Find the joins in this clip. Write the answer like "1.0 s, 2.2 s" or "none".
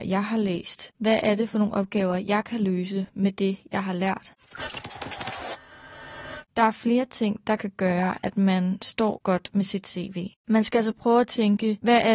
6.5 s, 10.4 s